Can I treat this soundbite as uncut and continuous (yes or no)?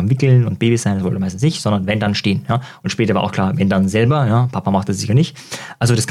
yes